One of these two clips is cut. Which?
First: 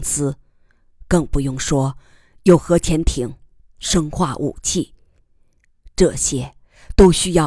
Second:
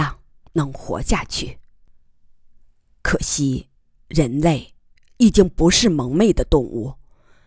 first; 1 cut; at 3.6 s

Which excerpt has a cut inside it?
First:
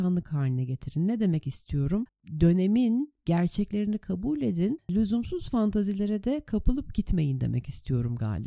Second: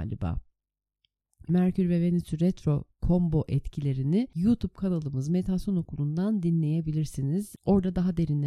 second; 1 cut; at 1.5 s

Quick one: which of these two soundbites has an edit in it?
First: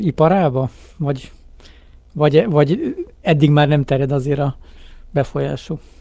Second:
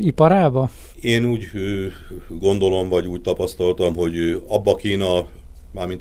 second; 1 cut; at 0.9 s

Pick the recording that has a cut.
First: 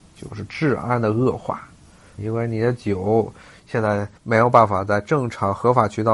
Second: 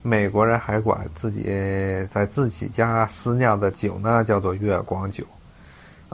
first; 2 cuts; at 2.2 s, 4.2 s

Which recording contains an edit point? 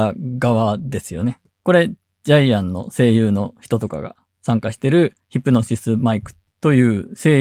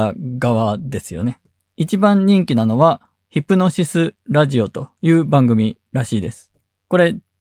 first; 2 cuts; at 1.5 s, 5.2 s

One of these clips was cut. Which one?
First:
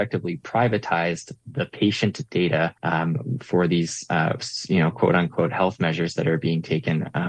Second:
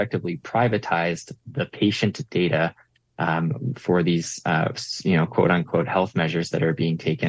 first; 1 cut; at 2.8 s

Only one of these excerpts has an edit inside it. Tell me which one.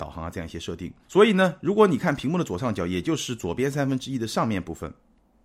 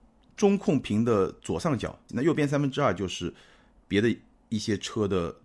second; 1 cut; at 2.1 s

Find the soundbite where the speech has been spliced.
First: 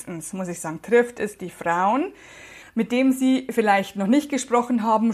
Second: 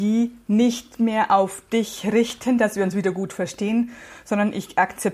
first; 1 cut; at 2.6 s

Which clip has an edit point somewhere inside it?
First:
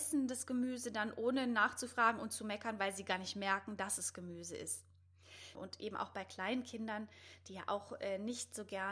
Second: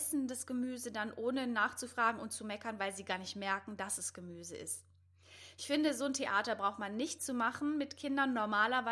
first; 1 cut; at 5.5 s

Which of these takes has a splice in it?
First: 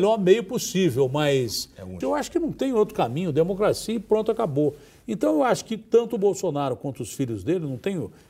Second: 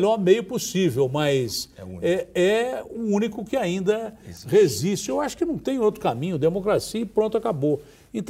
first; 1 cut; at 2.0 s

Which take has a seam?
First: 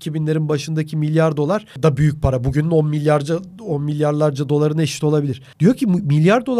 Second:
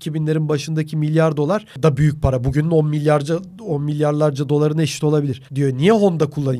second; 1 cut; at 5.5 s

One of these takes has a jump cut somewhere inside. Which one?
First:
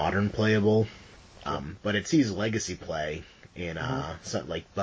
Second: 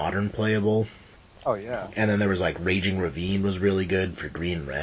first; 1 cut; at 1.4 s

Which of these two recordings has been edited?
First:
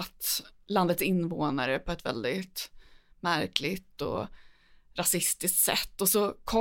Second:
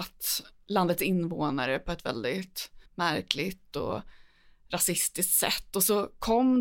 second; 1 cut; at 2.9 s

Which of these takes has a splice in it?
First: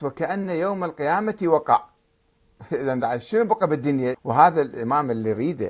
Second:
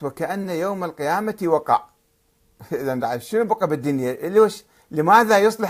first; 1 cut; at 4.1 s

